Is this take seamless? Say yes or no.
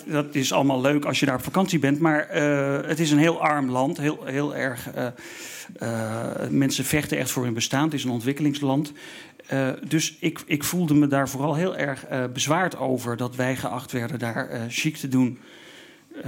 yes